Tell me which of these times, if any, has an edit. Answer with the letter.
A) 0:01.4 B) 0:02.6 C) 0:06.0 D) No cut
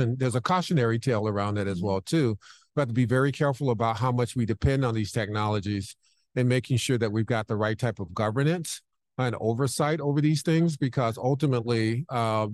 D